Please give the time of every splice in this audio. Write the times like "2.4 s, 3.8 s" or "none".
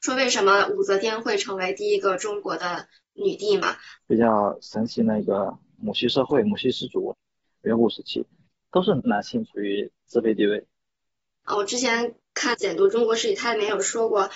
4.0 s